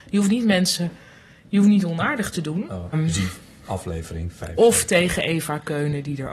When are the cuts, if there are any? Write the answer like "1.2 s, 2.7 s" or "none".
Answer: 2.9 s

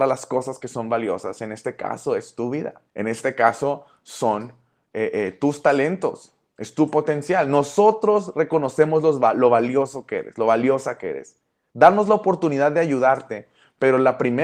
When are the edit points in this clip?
2.9 s

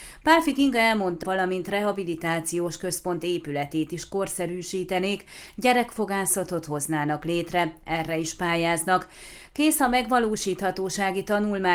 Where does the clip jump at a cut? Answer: 1.2 s

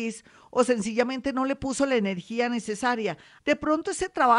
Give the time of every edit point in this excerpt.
3.4 s

